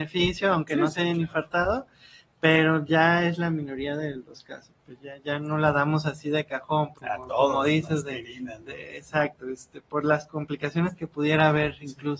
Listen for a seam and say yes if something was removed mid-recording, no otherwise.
yes